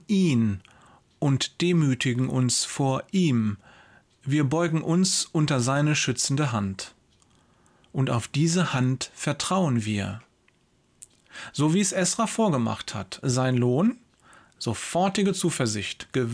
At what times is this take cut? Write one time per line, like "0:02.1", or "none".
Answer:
none

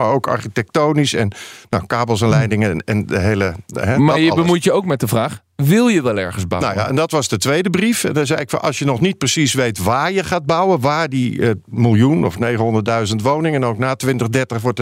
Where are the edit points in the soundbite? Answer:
none

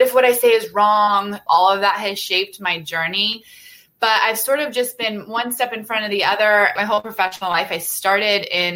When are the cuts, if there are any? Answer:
0:01.5
0:06.8

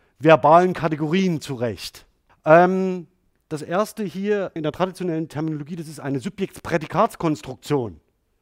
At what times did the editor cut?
0:02.3
0:04.6

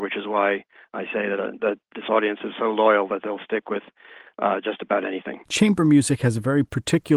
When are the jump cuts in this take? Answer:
0:05.4

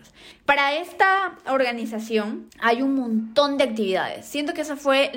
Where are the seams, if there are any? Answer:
0:02.5

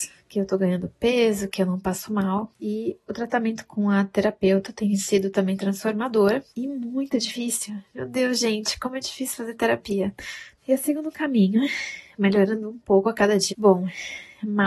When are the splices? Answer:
0:01.5
0:10.5
0:13.5

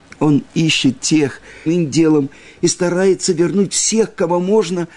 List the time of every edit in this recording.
0:01.7

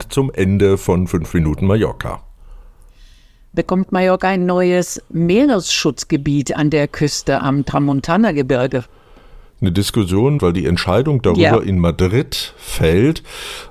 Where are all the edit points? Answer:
0:10.4

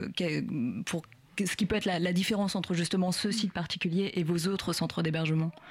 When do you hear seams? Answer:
none

